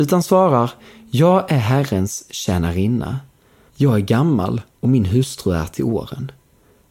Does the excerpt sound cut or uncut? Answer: cut